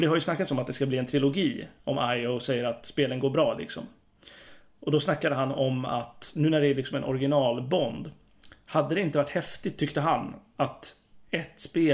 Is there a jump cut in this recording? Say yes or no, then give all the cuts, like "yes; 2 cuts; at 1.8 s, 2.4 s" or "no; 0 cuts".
no; 0 cuts